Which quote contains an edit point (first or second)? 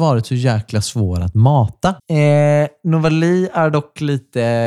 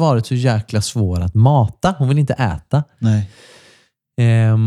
first